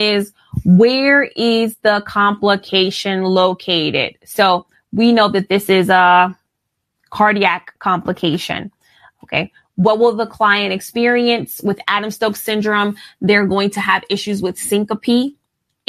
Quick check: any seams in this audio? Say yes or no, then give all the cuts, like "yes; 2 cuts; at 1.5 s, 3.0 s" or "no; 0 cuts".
no; 0 cuts